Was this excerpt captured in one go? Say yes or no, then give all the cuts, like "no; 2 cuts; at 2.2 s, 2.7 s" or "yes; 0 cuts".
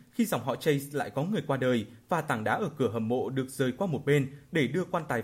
yes; 0 cuts